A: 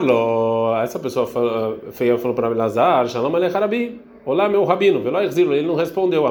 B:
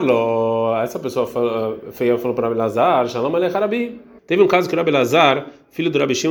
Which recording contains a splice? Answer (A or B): B